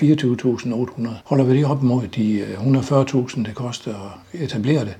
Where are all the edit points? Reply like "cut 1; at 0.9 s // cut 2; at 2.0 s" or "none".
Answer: cut 1; at 1.2 s